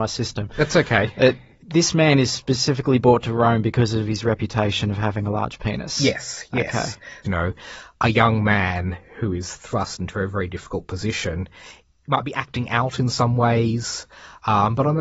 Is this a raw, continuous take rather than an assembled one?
no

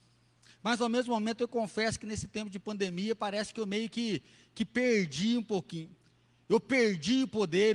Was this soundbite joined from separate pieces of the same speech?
no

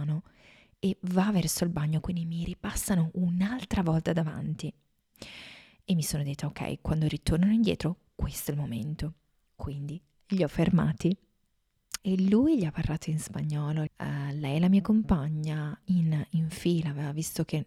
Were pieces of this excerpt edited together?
yes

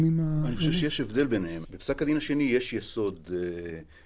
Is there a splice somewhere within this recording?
yes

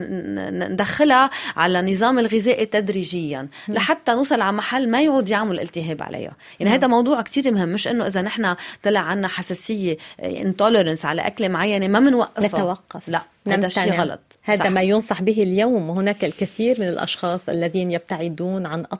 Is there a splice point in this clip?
no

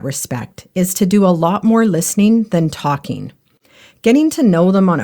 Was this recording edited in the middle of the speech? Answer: no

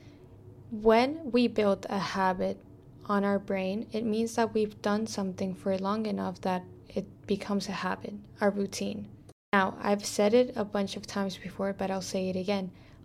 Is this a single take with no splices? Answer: yes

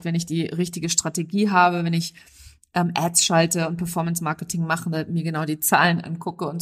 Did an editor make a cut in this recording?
no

